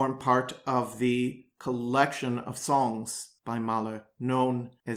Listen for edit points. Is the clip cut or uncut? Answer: uncut